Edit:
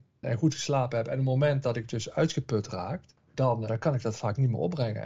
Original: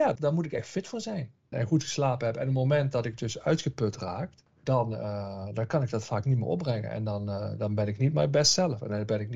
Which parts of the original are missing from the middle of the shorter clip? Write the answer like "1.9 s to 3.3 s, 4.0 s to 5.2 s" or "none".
4.9 s to 5.5 s